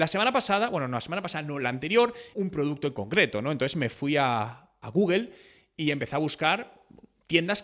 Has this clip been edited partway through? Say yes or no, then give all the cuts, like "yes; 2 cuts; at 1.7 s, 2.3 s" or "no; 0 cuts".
yes; 1 cut; at 2.3 s